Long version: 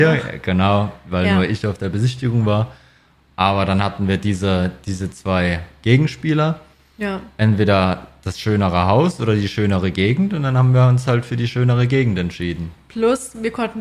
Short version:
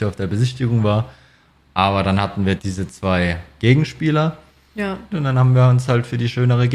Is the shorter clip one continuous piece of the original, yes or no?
no